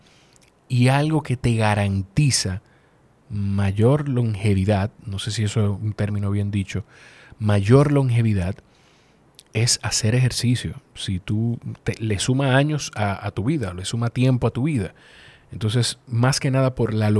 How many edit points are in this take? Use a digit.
0